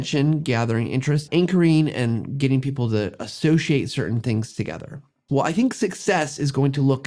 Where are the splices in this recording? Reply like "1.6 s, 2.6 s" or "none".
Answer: 1.3 s, 5.3 s